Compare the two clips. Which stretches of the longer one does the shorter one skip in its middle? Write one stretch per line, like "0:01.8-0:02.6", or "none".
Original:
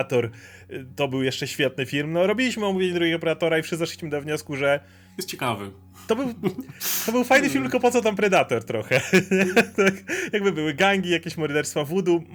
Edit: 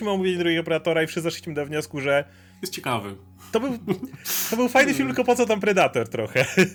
none